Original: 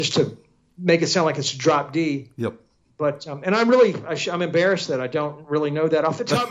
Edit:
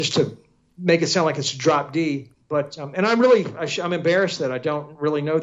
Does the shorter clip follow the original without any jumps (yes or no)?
no